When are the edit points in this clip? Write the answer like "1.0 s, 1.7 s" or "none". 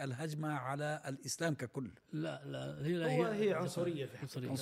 none